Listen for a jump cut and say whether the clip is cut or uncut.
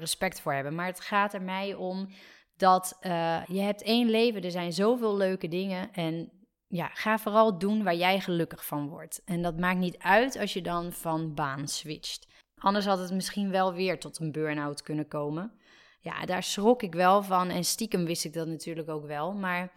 cut